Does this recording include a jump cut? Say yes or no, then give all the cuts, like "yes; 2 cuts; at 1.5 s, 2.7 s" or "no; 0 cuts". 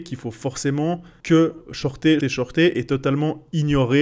yes; 2 cuts; at 1.2 s, 2.2 s